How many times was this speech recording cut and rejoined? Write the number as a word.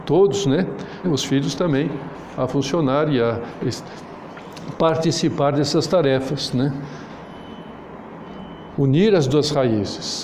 two